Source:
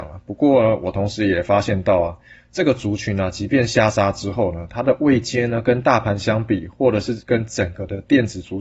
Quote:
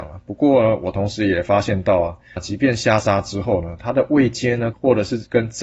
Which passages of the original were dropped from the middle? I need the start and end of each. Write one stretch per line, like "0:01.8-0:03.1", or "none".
0:02.4-0:03.3
0:05.6-0:06.7